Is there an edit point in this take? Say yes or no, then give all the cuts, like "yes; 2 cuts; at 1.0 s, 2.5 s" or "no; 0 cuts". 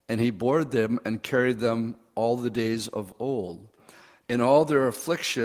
yes; 1 cut; at 4.2 s